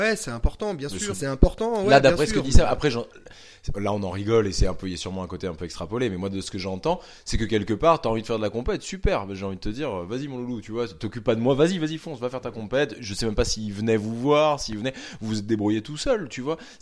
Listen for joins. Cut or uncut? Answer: cut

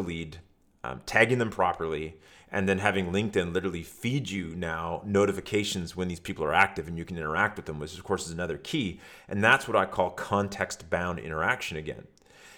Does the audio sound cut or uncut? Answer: uncut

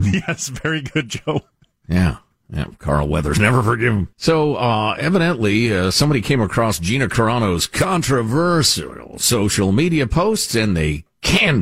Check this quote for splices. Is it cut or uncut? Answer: cut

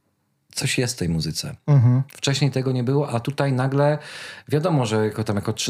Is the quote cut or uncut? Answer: cut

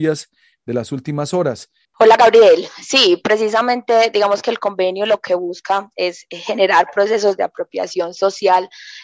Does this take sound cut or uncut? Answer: cut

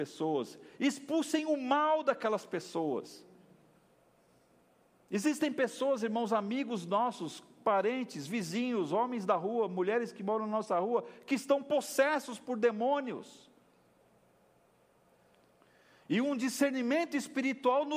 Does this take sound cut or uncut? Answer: uncut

